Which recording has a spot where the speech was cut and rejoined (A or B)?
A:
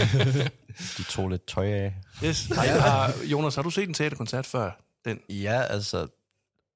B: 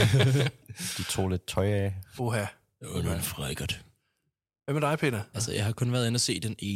B